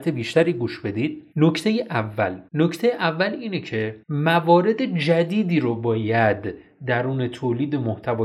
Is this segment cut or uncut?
cut